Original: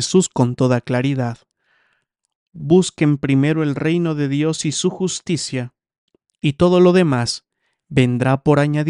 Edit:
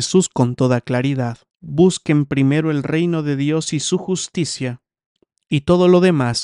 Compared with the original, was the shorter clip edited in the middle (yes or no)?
yes